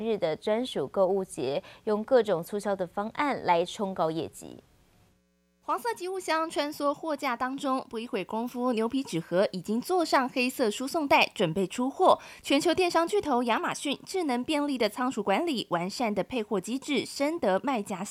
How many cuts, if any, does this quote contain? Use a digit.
0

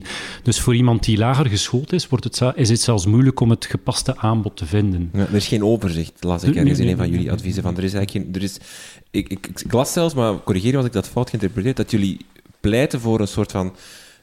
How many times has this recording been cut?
0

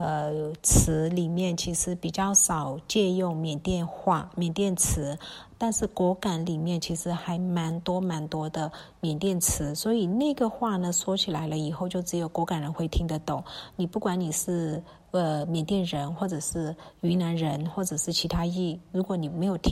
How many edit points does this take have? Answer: 0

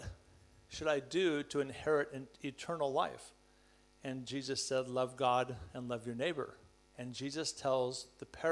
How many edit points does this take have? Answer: 1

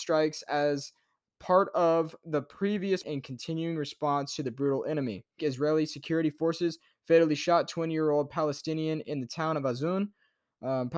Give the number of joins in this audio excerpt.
2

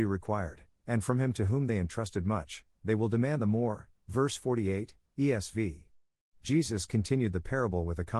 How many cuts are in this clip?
1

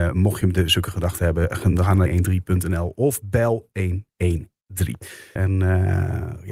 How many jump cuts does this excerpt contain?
2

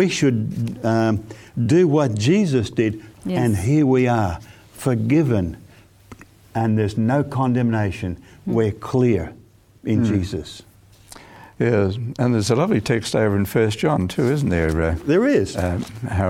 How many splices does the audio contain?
1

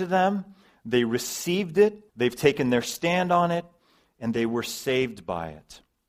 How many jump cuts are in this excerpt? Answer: 1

